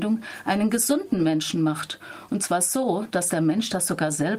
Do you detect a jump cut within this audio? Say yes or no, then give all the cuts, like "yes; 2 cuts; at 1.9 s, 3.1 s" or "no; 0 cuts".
no; 0 cuts